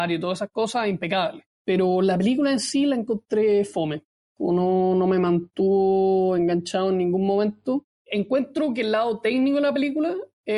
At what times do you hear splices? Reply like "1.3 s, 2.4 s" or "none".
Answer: 7.9 s